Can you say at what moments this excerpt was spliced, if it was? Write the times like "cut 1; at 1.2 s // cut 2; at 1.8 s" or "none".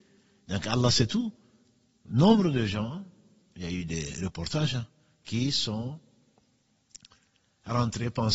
none